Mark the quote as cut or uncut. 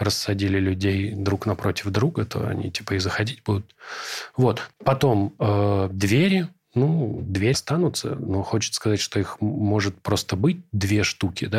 cut